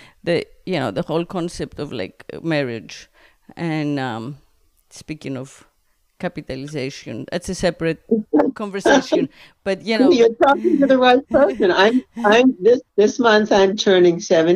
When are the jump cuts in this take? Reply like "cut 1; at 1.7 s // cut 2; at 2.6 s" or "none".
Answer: cut 1; at 12.9 s